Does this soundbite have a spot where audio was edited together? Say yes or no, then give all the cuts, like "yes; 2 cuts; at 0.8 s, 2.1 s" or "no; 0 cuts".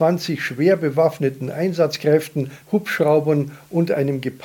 yes; 1 cut; at 2.6 s